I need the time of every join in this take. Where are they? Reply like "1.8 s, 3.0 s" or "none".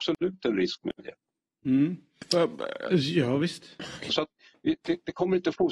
4.1 s